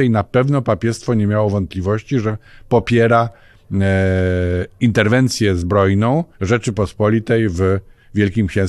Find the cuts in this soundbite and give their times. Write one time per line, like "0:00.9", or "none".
0:06.3